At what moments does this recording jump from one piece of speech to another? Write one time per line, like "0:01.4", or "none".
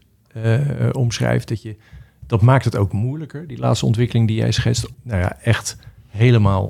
0:04.9